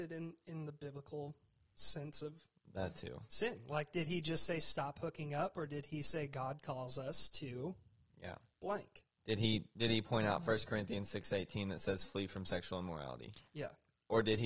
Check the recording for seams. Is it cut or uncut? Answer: uncut